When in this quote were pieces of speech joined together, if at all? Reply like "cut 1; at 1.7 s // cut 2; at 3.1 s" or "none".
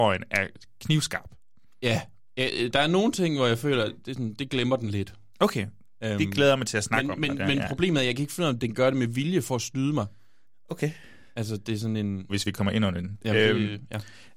cut 1; at 12.3 s